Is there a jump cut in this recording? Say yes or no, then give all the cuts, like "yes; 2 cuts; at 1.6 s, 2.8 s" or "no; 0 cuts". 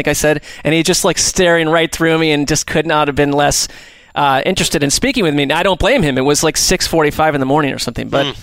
no; 0 cuts